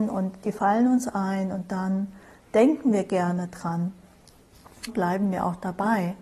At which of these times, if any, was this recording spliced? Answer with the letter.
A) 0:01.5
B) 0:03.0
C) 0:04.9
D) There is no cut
C